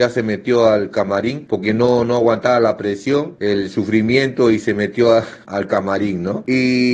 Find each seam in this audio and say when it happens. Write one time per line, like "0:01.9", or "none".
none